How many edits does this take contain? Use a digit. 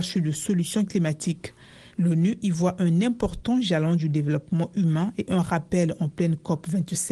1